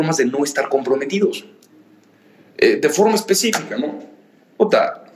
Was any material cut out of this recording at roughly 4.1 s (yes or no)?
no